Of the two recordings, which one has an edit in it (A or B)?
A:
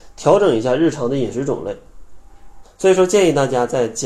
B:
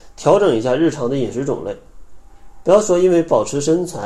A